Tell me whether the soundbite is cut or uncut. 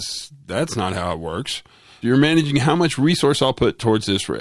cut